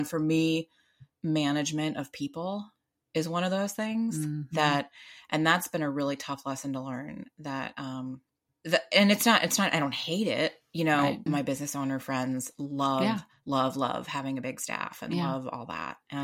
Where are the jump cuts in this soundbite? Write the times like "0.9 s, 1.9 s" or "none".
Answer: 11.3 s